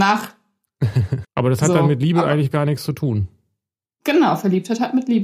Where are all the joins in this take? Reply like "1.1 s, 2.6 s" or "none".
1.2 s